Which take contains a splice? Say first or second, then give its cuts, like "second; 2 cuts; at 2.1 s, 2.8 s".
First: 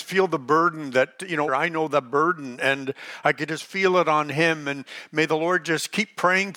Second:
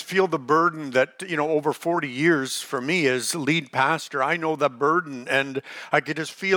first; 1 cut; at 1.5 s